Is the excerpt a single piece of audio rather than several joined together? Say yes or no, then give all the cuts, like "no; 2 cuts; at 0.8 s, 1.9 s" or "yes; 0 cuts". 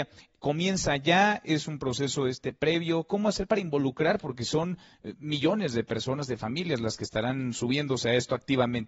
yes; 0 cuts